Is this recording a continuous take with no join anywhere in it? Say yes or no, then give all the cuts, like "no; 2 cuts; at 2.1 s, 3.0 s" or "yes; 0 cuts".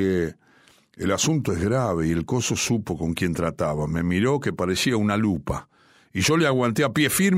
yes; 0 cuts